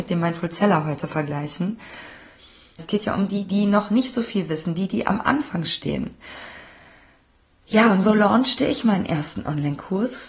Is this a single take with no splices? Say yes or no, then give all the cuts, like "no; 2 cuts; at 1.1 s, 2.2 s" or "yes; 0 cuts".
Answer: no; 1 cut; at 2.8 s